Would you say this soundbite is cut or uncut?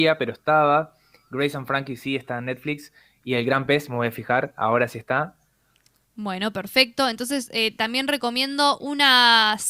uncut